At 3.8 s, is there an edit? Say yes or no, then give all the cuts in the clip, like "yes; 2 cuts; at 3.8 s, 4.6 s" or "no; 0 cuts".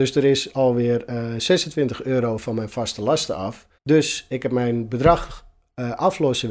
yes; 1 cut; at 3.8 s